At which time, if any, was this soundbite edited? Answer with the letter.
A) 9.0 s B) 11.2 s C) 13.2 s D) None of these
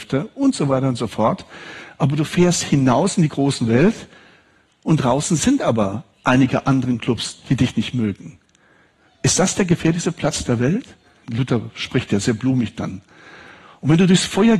B